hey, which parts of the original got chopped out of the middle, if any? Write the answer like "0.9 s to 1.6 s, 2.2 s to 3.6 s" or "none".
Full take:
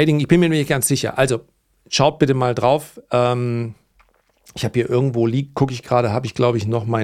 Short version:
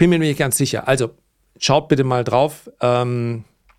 none